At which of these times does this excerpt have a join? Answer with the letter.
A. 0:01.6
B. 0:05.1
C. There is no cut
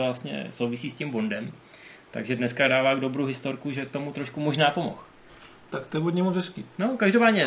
C